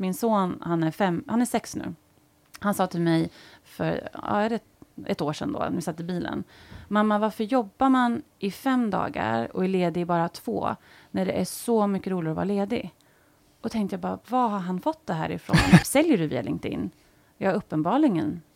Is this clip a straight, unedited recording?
no; 1 cut; at 15.8 s

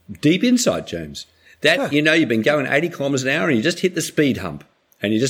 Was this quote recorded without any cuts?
yes; 0 cuts

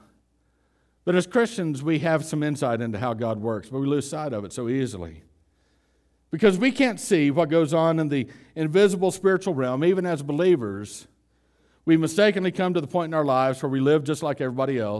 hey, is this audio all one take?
yes; 0 cuts

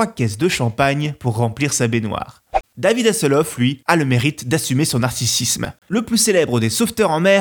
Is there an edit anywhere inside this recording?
no; 0 cuts

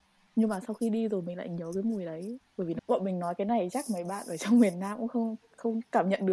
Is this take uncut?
no; 1 cut; at 2.8 s

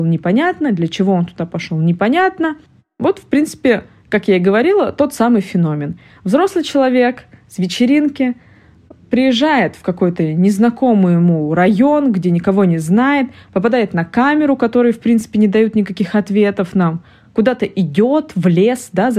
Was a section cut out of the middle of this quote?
no; 0 cuts

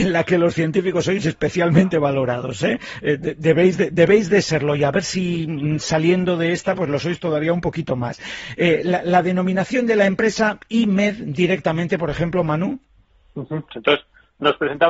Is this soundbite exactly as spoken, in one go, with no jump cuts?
no; 1 cut; at 13.7 s

